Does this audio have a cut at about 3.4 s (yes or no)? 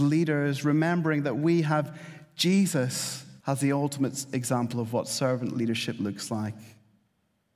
yes